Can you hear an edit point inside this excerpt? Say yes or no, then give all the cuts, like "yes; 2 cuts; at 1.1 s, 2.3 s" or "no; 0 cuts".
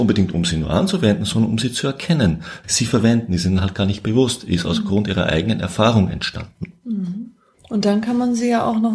yes; 1 cut; at 2.6 s